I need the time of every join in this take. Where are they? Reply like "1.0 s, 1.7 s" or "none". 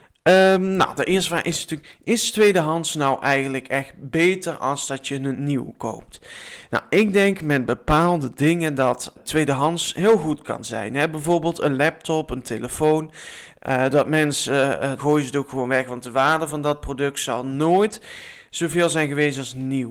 9.2 s, 13.5 s, 15.0 s